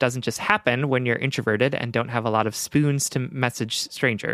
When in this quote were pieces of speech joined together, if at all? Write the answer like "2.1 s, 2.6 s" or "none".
none